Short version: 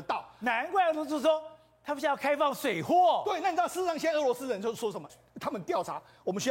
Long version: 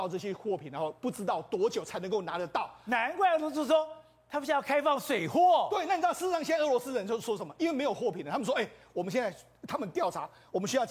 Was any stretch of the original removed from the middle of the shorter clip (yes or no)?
yes